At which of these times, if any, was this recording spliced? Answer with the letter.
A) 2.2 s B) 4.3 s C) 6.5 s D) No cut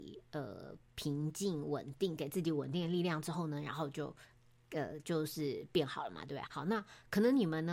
C